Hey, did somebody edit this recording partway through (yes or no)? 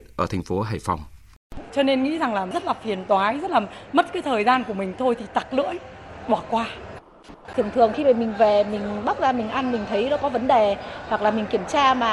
yes